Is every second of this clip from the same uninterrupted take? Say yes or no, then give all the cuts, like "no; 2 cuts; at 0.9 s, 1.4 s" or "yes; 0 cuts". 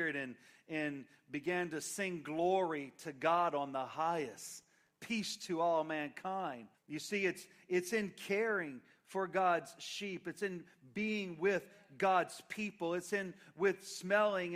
no; 1 cut; at 6.7 s